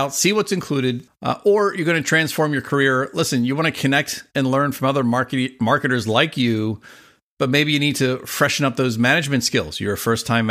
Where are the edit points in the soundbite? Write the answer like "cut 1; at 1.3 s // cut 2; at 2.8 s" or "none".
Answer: cut 1; at 1.1 s